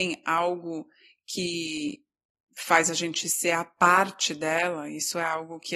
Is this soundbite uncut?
yes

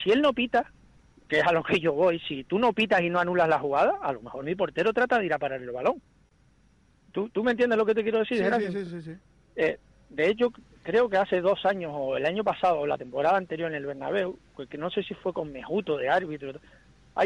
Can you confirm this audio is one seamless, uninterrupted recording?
yes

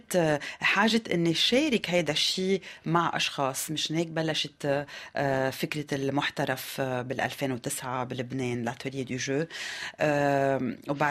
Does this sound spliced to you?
no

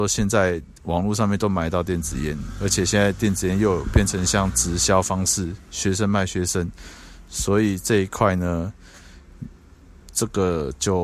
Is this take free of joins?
yes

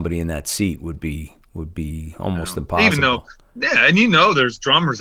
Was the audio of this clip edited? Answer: no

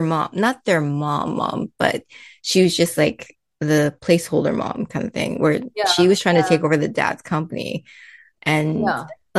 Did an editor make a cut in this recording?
no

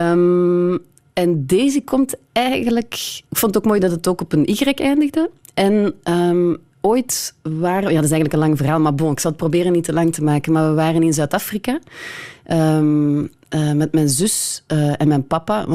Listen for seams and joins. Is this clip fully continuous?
no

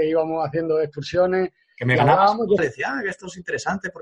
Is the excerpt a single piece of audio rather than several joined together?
no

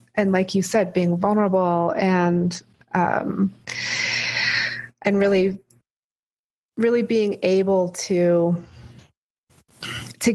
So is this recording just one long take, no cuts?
yes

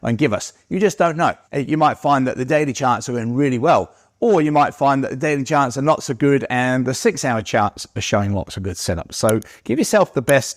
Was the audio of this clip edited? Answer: yes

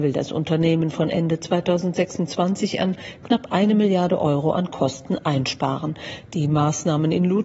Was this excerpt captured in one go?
yes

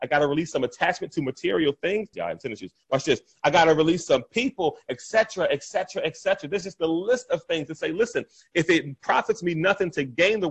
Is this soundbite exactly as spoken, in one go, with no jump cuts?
no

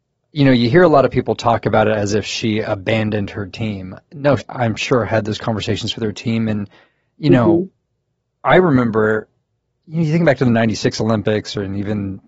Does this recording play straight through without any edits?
no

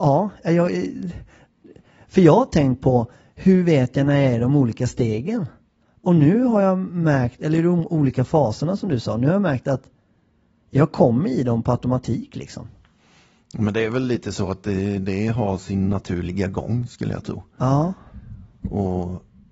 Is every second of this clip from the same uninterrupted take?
yes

